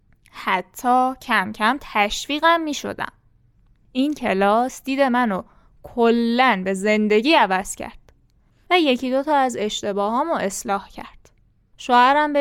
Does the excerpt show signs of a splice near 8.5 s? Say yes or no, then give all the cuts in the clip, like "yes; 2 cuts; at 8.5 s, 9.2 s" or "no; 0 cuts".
yes; 1 cut; at 8.5 s